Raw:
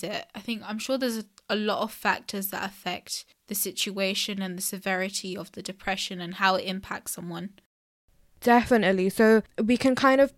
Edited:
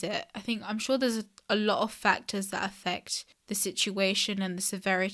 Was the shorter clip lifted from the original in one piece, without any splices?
yes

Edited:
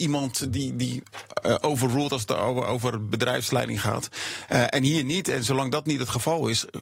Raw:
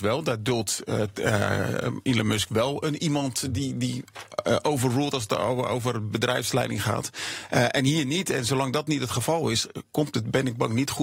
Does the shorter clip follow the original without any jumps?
yes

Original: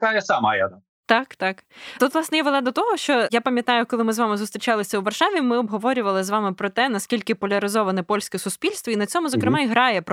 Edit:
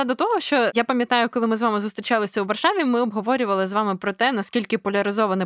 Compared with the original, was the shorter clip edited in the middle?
no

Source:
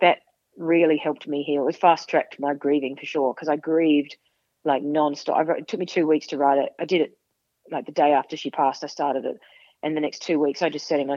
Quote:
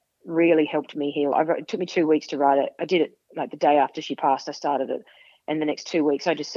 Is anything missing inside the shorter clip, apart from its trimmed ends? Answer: yes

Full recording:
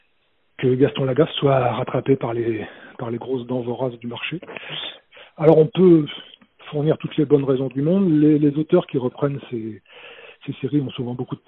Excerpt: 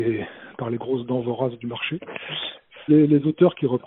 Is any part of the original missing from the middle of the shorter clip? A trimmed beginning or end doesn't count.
yes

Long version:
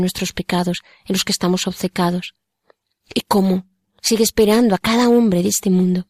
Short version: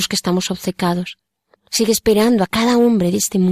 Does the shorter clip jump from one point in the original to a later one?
yes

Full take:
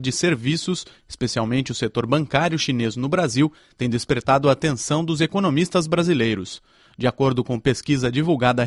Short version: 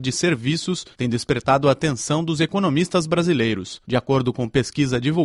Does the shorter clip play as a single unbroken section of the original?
no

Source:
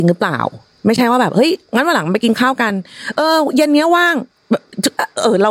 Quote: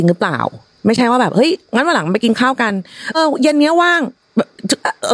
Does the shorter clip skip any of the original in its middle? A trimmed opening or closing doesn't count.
yes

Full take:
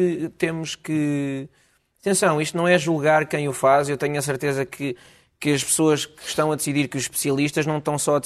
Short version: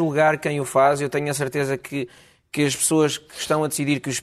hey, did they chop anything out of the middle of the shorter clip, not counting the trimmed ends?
no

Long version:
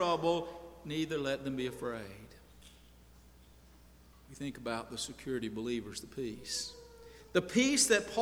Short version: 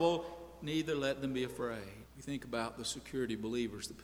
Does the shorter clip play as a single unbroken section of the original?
no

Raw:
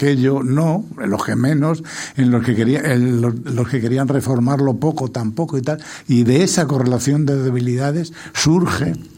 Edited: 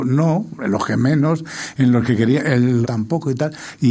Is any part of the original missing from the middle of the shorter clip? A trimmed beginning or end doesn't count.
yes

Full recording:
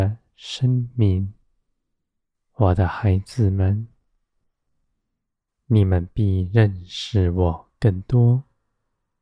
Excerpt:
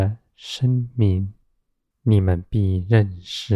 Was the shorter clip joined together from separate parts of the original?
yes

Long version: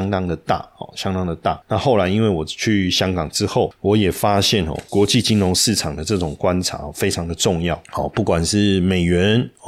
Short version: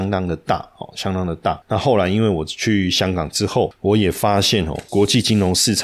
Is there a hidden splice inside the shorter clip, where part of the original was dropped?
no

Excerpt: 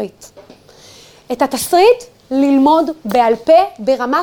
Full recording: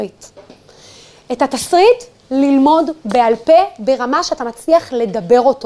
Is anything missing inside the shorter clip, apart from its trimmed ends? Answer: no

